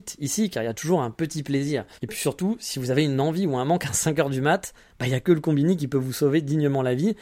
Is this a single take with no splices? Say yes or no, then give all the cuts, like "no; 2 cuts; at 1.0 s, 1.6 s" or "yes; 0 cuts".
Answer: no; 1 cut; at 1.9 s